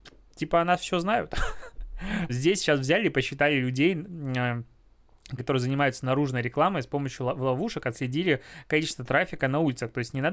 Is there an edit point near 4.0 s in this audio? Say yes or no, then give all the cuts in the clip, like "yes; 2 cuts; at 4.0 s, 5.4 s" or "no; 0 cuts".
no; 2 cuts; at 2.3 s, 5.4 s